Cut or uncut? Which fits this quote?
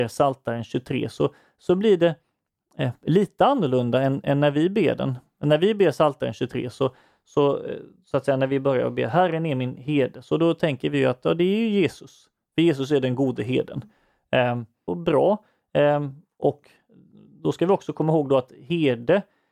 cut